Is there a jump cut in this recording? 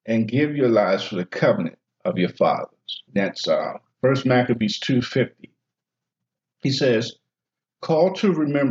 yes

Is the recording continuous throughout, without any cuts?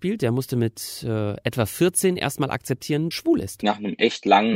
no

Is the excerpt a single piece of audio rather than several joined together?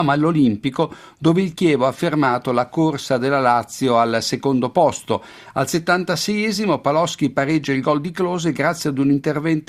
yes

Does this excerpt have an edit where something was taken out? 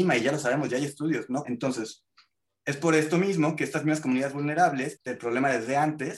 yes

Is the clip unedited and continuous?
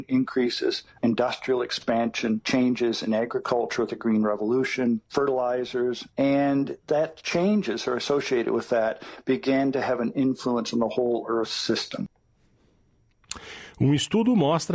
yes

